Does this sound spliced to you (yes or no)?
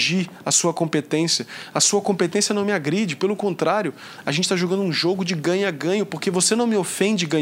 no